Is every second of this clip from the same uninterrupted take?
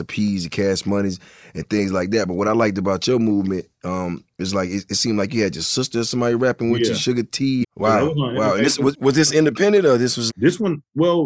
no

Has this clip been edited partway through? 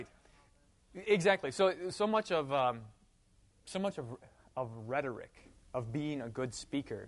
no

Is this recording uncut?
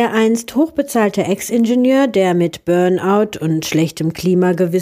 yes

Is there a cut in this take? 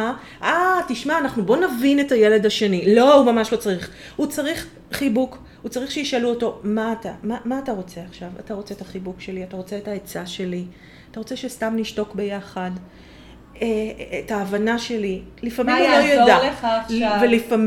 no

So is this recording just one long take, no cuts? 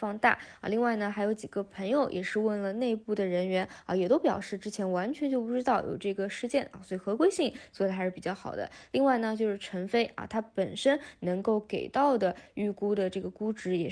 yes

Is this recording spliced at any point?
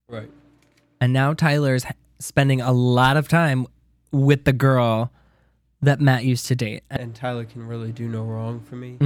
yes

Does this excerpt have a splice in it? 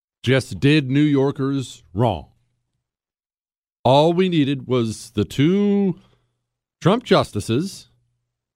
no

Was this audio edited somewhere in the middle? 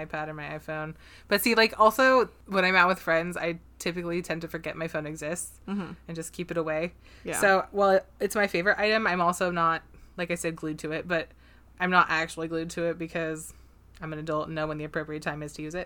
no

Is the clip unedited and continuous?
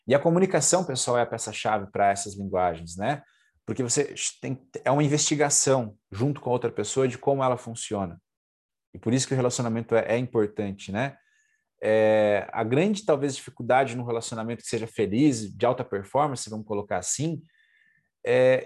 yes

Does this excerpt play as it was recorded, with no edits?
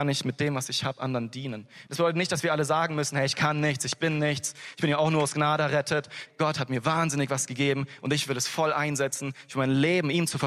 no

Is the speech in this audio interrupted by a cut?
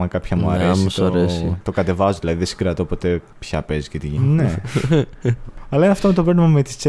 yes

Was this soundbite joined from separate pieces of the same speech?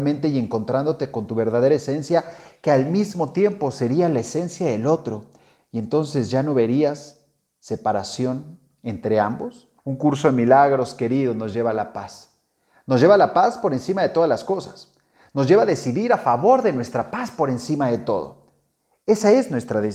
yes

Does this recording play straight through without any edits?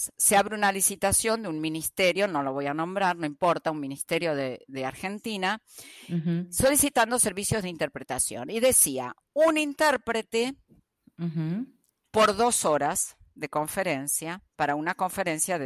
yes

